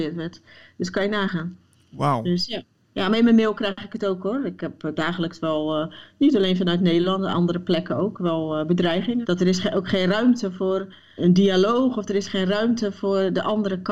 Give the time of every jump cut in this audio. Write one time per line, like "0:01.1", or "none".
0:09.2
0:11.2